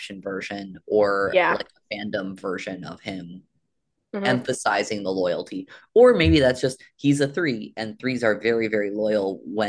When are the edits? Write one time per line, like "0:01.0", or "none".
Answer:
none

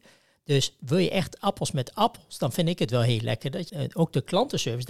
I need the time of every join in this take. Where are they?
0:03.7

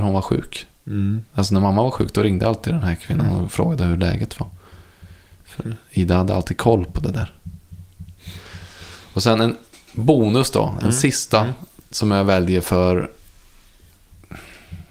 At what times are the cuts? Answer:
none

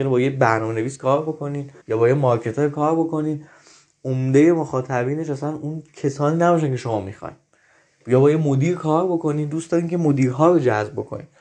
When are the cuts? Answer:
0:01.8

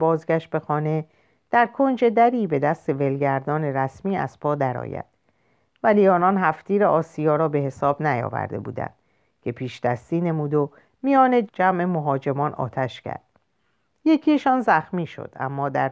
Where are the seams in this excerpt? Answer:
0:11.5

